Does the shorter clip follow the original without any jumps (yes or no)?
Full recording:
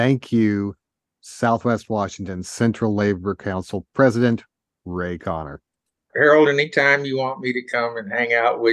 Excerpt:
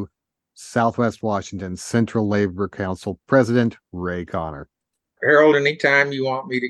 no